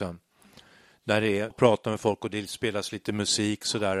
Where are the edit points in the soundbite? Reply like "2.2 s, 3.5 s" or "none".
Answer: 1.5 s